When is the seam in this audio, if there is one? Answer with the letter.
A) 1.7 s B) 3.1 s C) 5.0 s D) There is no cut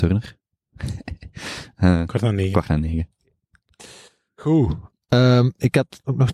D